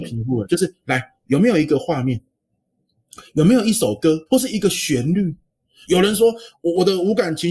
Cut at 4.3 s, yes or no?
yes